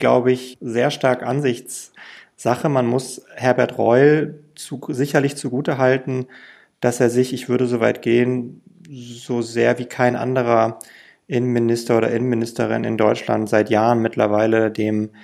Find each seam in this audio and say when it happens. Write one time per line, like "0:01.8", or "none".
none